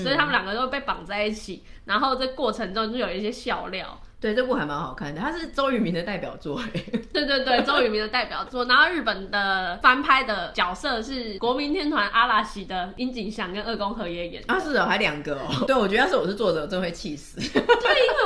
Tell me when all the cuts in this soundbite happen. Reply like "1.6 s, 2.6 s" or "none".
15.7 s